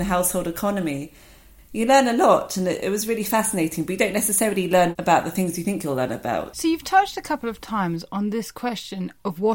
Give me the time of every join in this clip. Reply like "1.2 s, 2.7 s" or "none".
1.6 s, 6.5 s